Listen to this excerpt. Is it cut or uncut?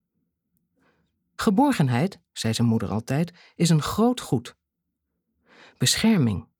uncut